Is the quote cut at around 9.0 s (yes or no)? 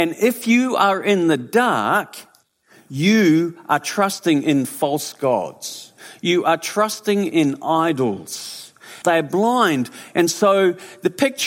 yes